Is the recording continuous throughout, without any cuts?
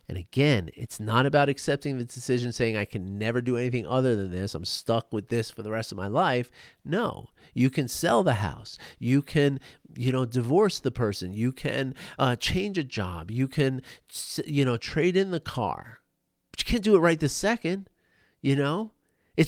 yes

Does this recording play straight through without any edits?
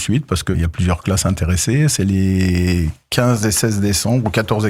yes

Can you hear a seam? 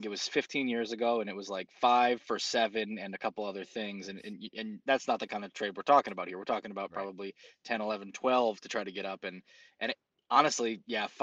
no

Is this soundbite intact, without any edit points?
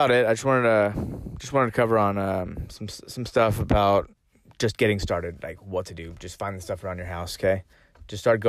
yes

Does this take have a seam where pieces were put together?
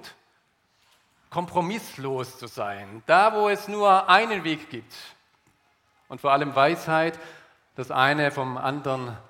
no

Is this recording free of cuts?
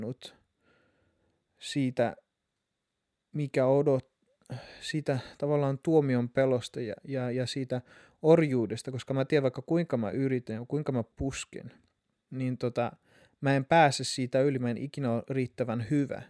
yes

